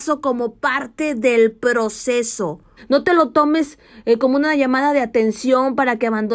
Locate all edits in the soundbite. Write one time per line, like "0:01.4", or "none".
0:02.8